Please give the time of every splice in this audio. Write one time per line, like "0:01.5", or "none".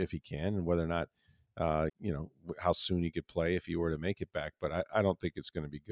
0:01.9